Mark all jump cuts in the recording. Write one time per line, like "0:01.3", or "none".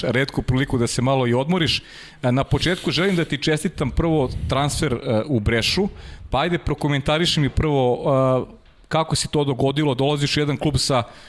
none